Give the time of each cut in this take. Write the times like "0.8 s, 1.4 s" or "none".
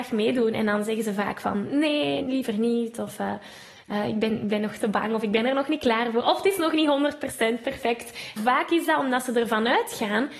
2.2 s, 8.4 s